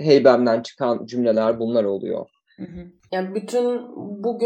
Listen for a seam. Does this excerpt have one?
no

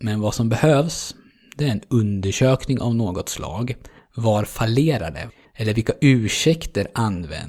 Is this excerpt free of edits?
no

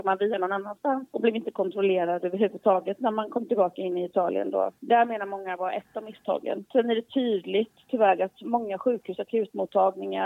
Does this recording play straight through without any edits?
yes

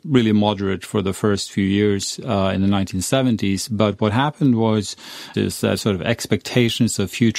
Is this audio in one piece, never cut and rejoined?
no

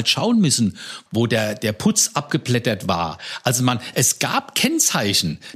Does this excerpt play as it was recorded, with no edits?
no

